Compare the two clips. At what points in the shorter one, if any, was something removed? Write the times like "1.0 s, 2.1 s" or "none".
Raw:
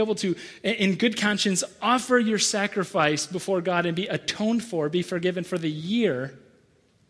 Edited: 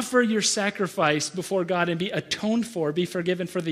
none